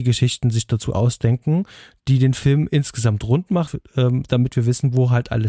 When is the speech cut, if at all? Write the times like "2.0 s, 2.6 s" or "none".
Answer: 3.7 s